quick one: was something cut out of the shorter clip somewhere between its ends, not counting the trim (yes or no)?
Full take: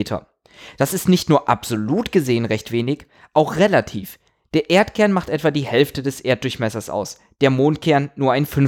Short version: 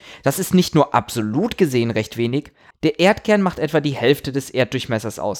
yes